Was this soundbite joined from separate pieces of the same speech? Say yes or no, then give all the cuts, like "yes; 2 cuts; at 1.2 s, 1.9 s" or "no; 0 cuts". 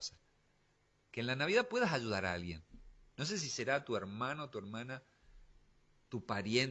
no; 0 cuts